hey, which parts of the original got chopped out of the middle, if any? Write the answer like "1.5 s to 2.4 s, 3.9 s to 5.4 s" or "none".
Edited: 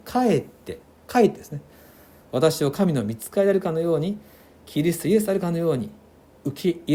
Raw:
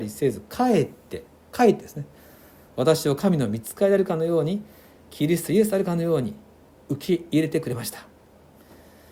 none